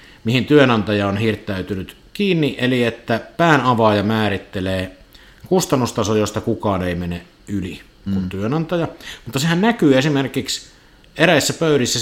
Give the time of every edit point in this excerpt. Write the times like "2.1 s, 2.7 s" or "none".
8.1 s